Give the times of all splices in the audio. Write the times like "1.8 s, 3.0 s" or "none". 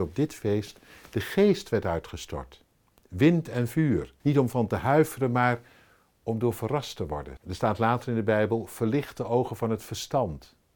4.2 s, 7.4 s